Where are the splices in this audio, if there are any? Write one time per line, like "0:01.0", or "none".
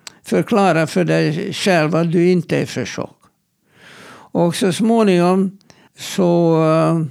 0:05.9